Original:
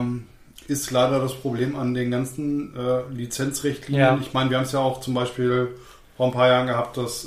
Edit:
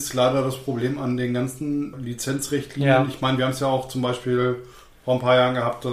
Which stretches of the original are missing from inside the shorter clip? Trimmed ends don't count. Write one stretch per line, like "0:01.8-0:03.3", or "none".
0:02.7-0:03.1